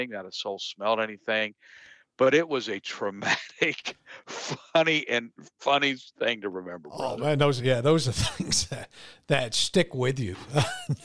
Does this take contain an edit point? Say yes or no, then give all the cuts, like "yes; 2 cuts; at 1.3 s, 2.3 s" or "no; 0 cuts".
no; 0 cuts